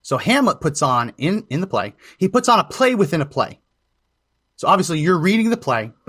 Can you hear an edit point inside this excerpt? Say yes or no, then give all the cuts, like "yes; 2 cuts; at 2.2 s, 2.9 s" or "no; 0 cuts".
no; 0 cuts